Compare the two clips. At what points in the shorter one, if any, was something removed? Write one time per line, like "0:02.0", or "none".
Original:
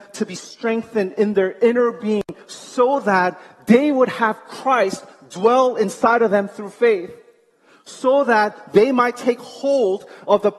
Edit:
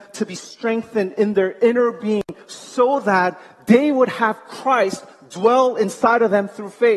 none